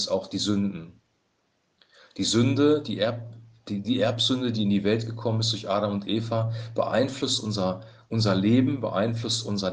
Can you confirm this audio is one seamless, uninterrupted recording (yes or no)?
yes